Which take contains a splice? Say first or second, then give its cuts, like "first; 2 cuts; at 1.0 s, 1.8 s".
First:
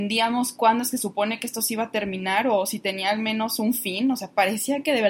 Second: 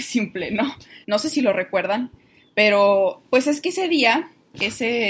second; 1 cut; at 1.0 s